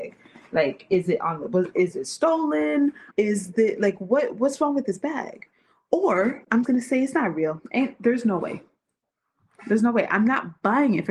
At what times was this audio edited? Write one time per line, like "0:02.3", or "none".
0:03.1
0:06.6